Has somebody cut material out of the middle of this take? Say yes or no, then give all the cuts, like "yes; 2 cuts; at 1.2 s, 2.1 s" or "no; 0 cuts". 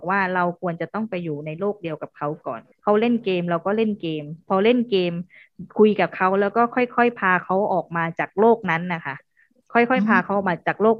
yes; 1 cut; at 2.7 s